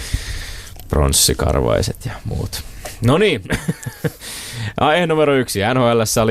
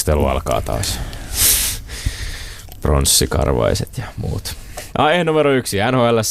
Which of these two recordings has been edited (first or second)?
second